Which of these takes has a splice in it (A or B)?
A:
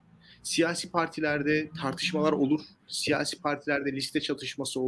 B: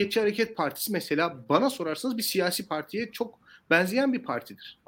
A